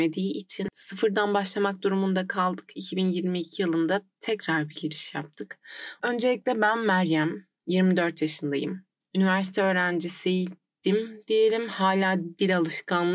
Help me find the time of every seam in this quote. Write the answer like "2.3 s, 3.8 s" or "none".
6.0 s

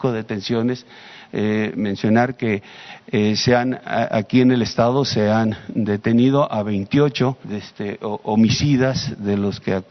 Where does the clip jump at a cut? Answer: 7.4 s

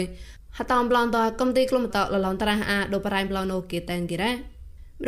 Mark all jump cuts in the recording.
1.9 s

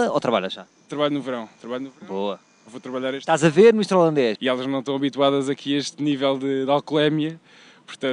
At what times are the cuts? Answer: 4.4 s

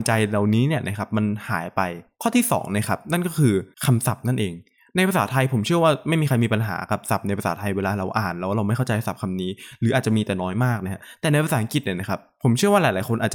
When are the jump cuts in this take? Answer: 3.7 s

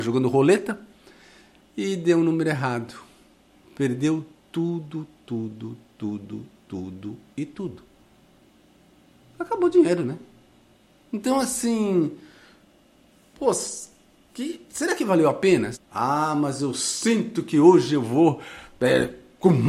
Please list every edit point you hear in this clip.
15.7 s

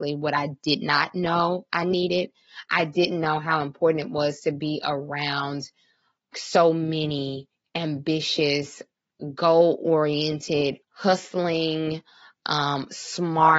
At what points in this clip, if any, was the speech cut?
6.3 s, 10.8 s

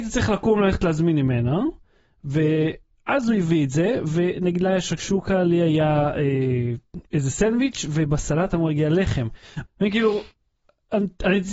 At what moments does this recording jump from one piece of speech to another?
9.6 s

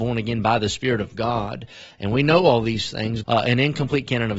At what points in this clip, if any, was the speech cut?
3.2 s

